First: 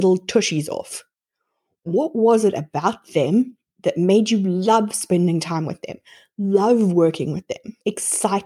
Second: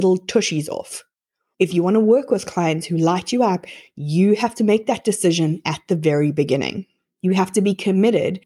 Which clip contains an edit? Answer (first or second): second